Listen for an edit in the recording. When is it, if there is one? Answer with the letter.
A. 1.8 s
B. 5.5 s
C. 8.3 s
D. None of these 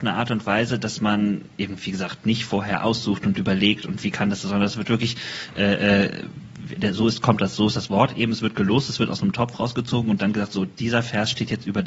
D